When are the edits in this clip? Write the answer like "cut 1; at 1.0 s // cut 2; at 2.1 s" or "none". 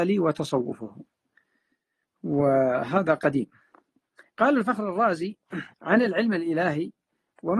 cut 1; at 5.7 s